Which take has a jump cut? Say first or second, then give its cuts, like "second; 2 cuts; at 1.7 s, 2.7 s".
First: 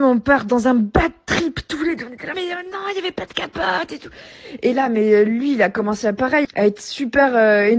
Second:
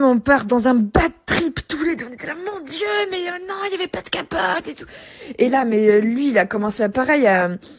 first; 2 cuts; at 2.3 s, 6.4 s